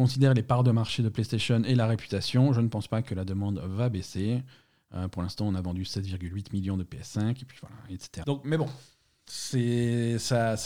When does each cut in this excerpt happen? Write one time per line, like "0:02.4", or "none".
0:08.2